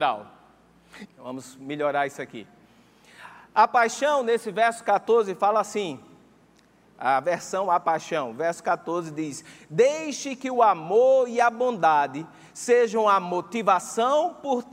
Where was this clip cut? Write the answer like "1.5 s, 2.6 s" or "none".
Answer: 1.1 s